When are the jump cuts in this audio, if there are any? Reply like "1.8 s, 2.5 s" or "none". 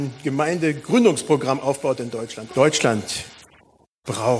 2.5 s